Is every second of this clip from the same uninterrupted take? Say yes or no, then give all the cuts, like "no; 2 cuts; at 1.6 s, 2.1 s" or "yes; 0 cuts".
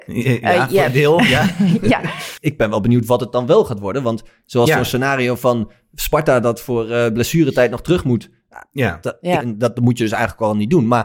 no; 2 cuts; at 2.4 s, 9.4 s